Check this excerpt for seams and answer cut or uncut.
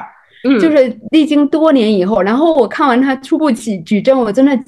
uncut